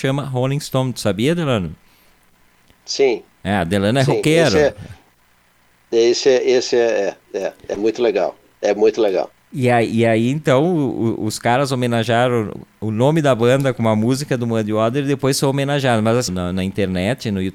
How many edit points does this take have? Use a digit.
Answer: 1